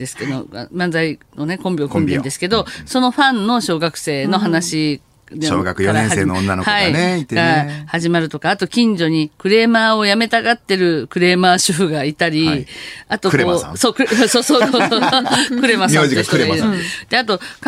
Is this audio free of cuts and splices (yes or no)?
yes